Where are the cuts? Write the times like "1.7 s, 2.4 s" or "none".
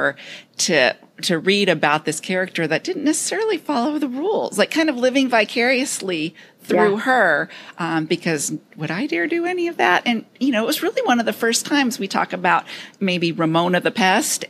none